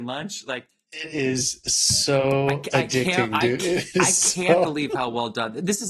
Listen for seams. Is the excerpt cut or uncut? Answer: uncut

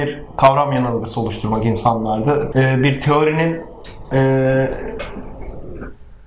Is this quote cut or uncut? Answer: cut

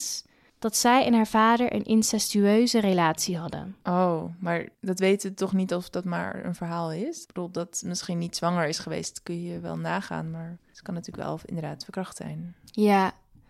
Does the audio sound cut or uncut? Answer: cut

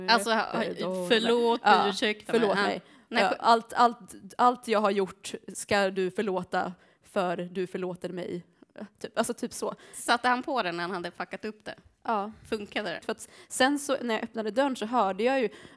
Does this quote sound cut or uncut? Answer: cut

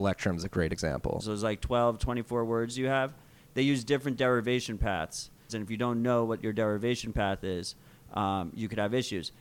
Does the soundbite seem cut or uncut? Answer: cut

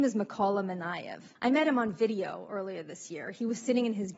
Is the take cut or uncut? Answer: cut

